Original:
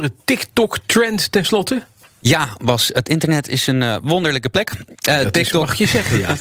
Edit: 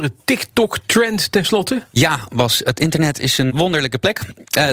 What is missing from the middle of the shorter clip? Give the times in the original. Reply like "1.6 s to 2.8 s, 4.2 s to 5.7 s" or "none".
1.9 s to 2.2 s, 3.8 s to 4.0 s